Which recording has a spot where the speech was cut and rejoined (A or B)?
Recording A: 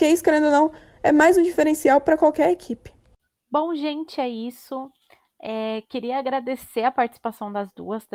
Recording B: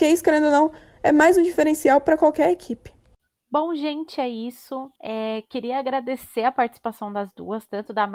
B